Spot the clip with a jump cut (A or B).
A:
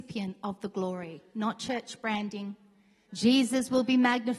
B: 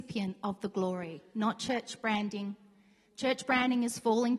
A